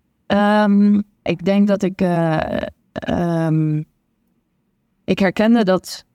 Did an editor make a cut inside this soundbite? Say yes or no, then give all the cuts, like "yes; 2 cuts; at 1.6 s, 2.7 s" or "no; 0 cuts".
yes; 1 cut; at 1.3 s